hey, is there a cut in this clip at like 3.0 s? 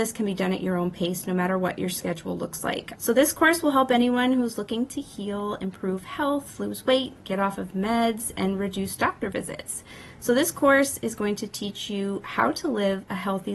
yes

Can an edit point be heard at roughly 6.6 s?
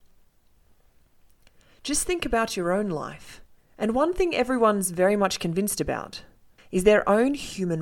yes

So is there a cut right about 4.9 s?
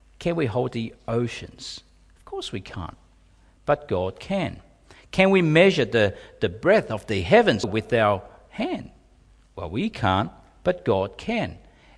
no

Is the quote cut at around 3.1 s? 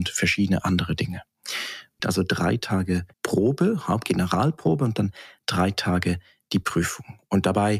yes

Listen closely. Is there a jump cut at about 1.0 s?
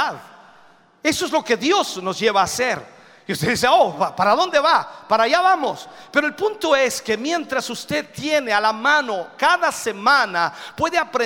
no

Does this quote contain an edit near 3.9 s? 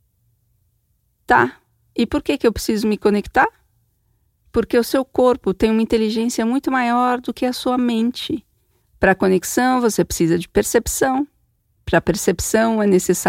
no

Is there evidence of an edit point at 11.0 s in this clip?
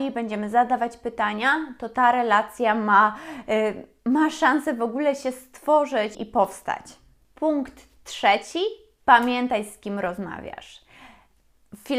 no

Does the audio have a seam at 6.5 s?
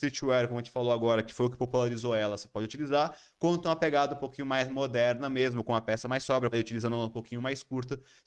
yes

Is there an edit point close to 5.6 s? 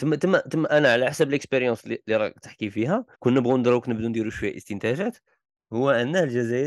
no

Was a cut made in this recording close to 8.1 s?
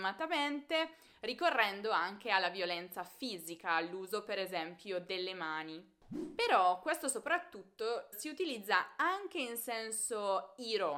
yes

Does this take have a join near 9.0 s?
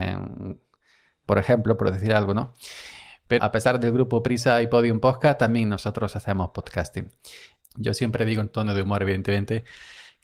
no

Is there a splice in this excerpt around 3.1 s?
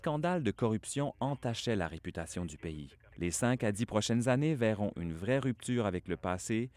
yes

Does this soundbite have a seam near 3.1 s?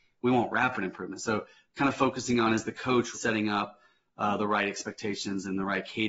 yes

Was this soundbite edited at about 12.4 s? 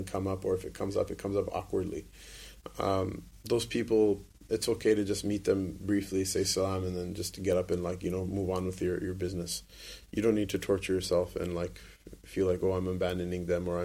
no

